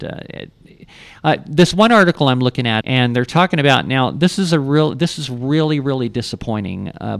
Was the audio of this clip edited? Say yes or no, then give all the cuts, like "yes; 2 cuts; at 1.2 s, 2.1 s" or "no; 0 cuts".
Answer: yes; 1 cut; at 2.8 s